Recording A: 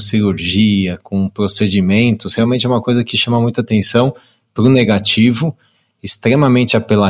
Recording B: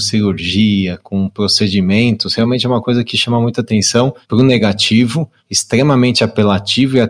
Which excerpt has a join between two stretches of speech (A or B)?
B